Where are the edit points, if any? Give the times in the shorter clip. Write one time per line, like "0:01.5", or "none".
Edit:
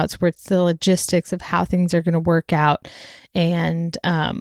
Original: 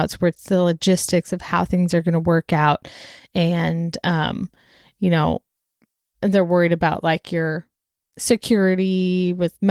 none